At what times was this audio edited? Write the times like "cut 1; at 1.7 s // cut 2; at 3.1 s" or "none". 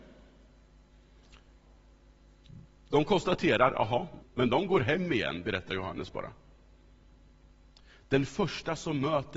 cut 1; at 4.2 s